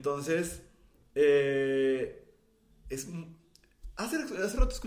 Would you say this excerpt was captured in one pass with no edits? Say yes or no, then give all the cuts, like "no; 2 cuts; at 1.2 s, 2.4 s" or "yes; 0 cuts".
yes; 0 cuts